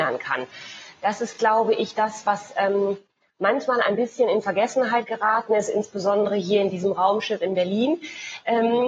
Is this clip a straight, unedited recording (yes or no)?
yes